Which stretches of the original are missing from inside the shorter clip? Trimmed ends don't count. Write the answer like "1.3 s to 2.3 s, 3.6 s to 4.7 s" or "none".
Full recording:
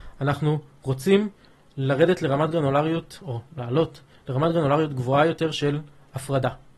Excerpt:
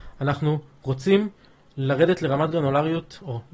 none